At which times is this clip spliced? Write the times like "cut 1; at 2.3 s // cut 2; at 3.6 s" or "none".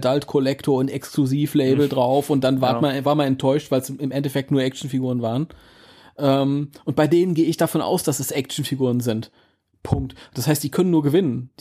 none